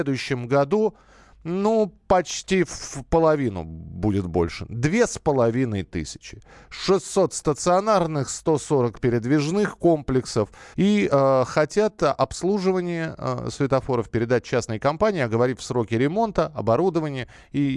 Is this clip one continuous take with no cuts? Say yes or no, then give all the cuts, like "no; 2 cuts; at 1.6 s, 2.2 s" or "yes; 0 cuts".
no; 1 cut; at 10.7 s